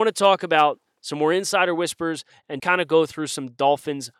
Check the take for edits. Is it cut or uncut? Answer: cut